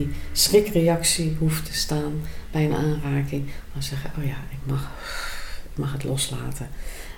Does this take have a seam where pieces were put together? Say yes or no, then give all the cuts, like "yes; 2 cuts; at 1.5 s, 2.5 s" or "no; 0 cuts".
no; 0 cuts